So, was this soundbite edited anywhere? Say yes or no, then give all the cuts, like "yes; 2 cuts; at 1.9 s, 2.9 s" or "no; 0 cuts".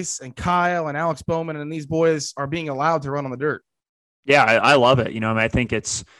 no; 0 cuts